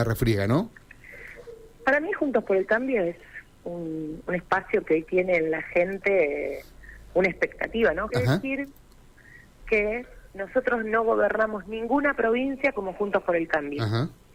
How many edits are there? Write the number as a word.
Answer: two